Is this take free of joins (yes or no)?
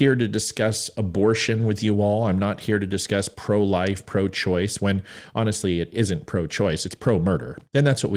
no